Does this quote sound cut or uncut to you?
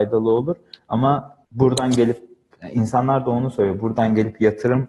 cut